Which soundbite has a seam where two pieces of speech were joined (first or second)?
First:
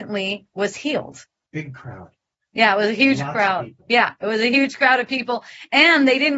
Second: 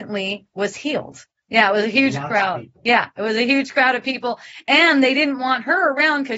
second